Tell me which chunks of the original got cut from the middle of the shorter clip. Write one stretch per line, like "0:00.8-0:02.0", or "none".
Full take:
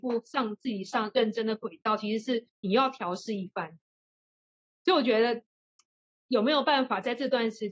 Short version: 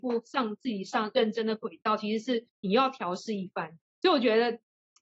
0:03.9-0:04.7